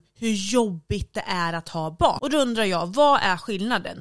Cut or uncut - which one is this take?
cut